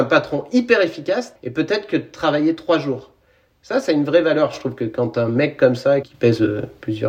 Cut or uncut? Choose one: cut